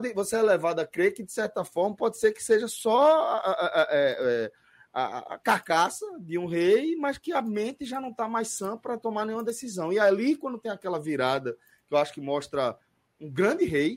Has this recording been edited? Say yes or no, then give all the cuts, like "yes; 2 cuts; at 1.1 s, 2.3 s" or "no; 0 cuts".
no; 0 cuts